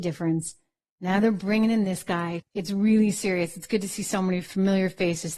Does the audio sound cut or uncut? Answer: cut